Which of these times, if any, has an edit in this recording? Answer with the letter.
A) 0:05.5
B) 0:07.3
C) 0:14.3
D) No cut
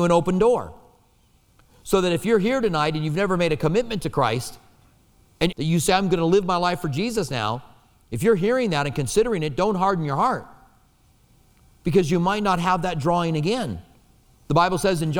A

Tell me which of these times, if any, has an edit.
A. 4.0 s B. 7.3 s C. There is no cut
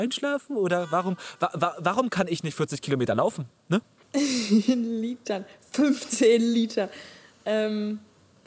A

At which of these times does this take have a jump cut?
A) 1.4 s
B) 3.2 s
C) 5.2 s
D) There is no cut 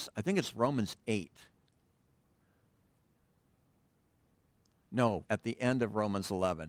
C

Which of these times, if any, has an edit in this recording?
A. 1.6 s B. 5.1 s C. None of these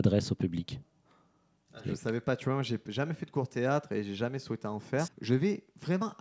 B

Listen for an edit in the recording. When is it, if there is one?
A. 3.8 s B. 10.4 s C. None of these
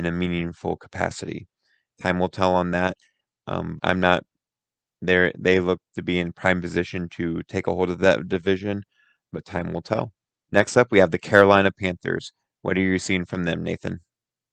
A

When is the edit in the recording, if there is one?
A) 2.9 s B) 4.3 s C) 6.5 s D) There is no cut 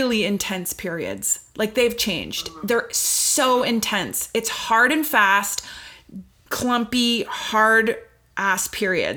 C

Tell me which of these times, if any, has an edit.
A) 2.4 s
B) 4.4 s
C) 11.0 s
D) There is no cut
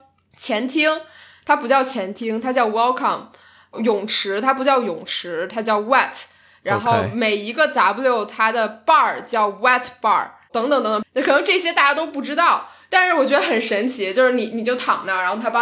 C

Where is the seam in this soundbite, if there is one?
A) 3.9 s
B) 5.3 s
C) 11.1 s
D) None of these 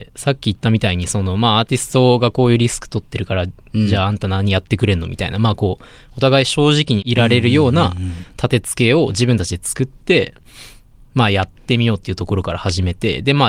D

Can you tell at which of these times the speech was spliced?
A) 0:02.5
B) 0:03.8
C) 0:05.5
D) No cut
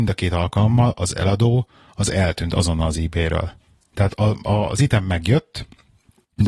D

